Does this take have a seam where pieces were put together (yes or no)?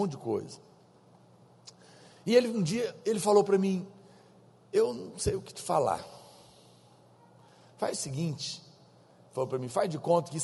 no